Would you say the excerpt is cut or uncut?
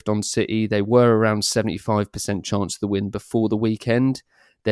uncut